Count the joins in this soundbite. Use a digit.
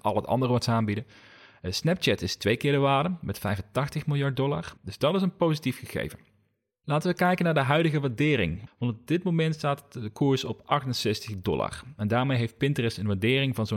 2